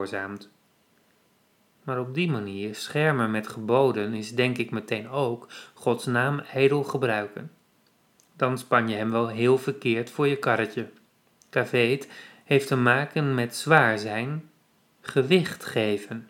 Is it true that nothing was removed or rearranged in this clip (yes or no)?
no